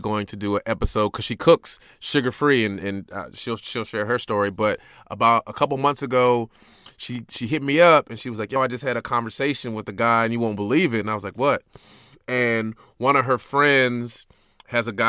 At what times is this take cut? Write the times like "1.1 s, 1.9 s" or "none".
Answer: none